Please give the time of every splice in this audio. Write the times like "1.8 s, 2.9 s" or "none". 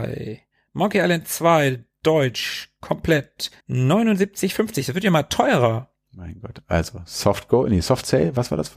3.6 s